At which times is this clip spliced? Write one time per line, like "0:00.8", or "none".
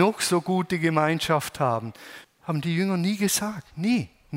0:02.2